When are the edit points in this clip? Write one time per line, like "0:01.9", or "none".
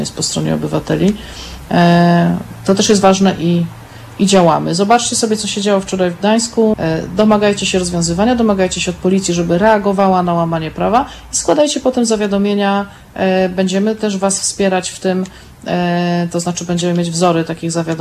0:06.7